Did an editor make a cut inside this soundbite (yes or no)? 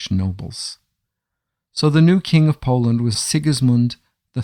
yes